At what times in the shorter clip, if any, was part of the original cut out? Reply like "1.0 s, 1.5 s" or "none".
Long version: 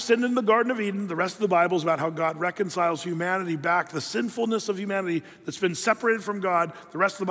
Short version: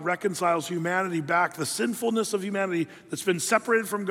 none